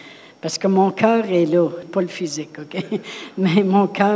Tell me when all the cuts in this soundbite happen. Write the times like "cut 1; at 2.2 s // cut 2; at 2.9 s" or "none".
cut 1; at 1.8 s